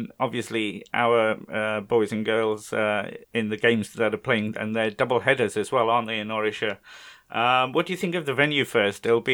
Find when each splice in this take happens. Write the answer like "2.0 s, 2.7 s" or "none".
3.2 s